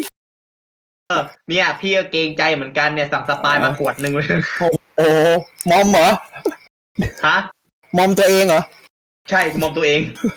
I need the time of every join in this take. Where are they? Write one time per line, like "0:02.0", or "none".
0:01.1